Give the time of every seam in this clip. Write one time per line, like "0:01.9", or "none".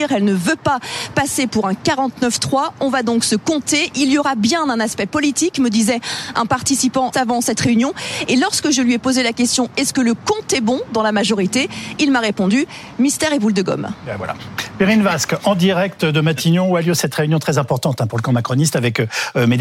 0:07.1